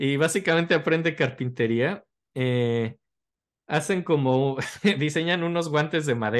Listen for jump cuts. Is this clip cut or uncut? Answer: uncut